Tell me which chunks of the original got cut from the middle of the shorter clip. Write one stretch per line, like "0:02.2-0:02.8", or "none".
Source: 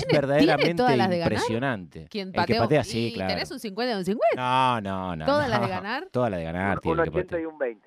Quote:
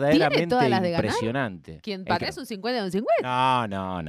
0:02.5-0:03.3